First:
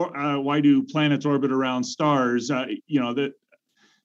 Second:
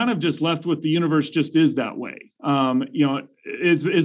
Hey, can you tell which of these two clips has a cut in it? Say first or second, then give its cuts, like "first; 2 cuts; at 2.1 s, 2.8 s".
second; 1 cut; at 2.4 s